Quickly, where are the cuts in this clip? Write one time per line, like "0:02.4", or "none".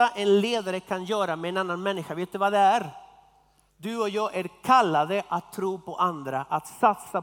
0:03.7